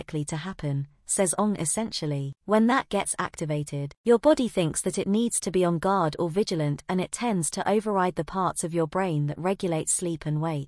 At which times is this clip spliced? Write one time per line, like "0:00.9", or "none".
0:02.3